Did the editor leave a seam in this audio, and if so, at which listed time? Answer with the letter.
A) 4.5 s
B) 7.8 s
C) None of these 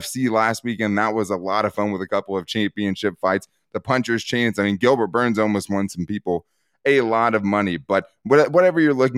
C